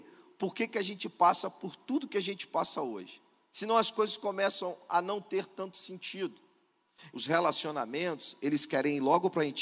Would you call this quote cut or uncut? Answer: cut